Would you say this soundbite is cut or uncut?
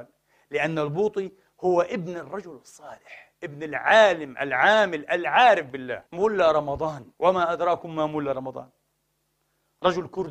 cut